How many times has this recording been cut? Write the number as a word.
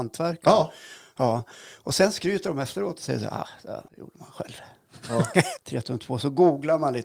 two